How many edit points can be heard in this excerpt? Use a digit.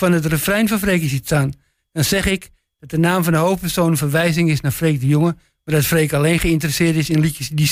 0